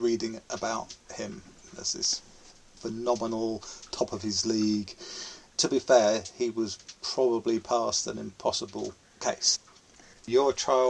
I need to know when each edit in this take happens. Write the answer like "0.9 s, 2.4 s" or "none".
5.5 s, 7.0 s